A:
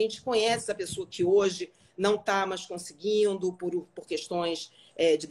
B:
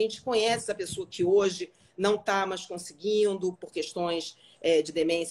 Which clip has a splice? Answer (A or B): B